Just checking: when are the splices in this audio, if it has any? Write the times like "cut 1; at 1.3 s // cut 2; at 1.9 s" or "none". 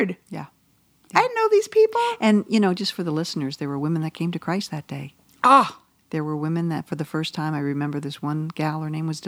none